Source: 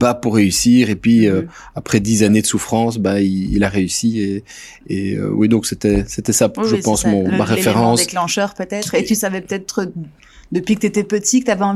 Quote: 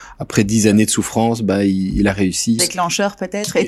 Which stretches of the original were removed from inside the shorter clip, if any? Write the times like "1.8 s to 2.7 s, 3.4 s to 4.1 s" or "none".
4.1 s to 8.0 s